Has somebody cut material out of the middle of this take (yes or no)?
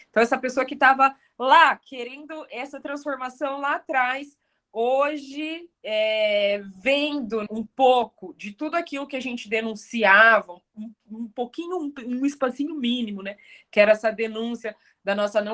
yes